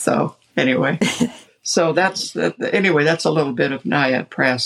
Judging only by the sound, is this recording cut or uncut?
uncut